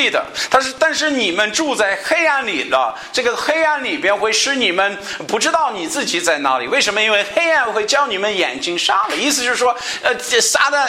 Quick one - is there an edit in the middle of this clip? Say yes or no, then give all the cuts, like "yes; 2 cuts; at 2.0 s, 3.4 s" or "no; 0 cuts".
no; 0 cuts